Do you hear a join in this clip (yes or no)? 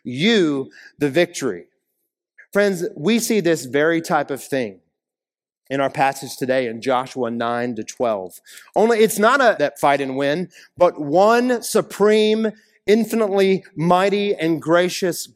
yes